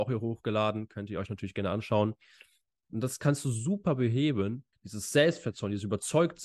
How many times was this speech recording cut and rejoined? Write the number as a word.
two